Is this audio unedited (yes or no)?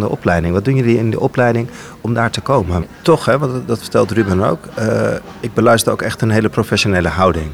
no